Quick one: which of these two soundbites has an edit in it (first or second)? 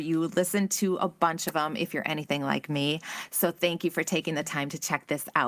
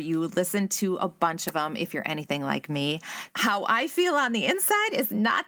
second